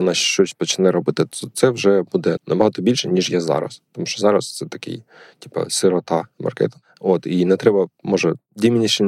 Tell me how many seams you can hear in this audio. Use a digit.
1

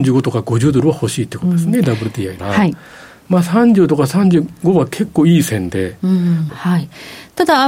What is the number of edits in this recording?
2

